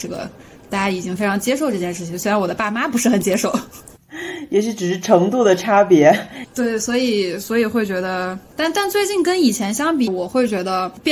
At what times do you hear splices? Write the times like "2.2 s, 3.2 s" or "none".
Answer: 10.1 s

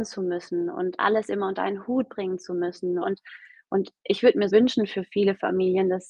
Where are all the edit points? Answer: 3.0 s, 4.5 s

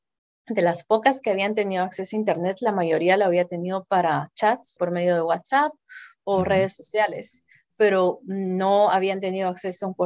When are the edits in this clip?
4.8 s

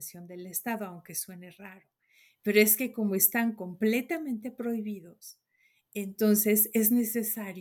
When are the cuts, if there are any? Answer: none

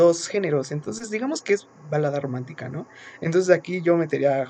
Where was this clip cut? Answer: none

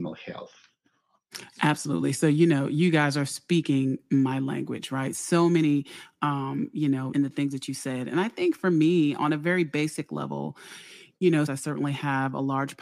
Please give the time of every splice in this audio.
7.1 s, 11.5 s

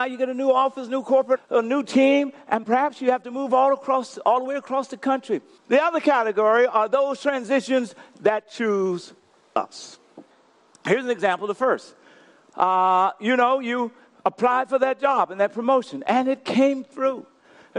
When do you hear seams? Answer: 1.4 s, 5.6 s

